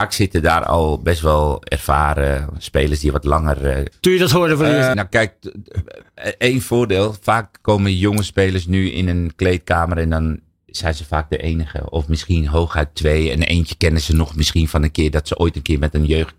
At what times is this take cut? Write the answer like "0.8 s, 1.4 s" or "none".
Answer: 3.9 s, 4.9 s